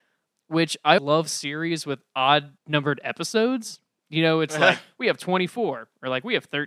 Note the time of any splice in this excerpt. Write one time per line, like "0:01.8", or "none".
0:01.0
0:02.6